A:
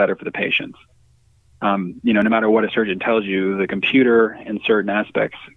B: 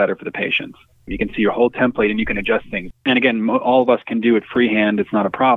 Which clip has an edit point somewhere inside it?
B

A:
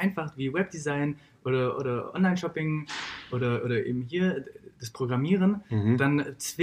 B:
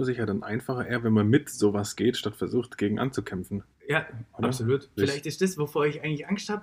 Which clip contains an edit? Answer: B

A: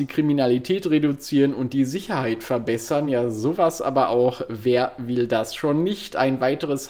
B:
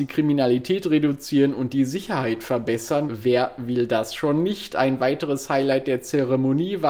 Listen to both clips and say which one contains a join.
B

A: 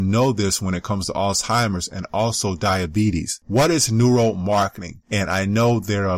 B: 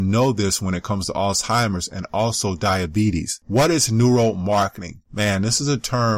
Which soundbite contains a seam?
A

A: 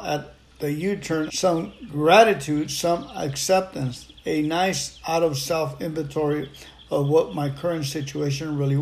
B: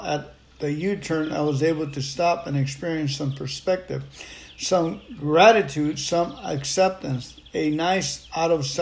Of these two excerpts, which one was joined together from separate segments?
A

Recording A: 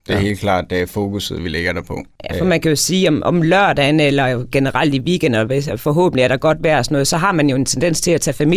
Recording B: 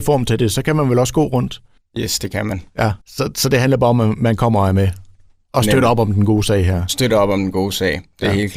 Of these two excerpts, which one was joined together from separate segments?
B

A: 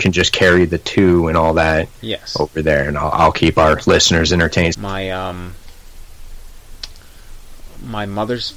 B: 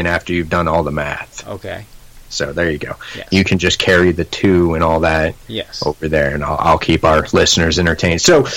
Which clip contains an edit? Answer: A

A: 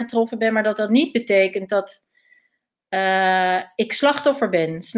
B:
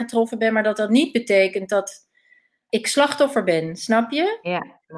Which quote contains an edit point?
B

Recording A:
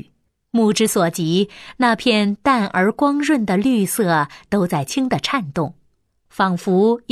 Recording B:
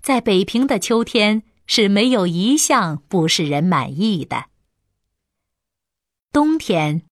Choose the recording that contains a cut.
A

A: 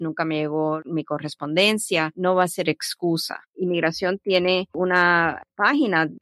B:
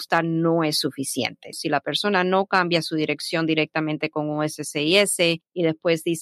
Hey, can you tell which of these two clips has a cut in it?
A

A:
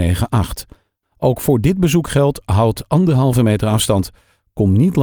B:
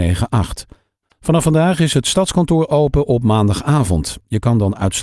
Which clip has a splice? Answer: B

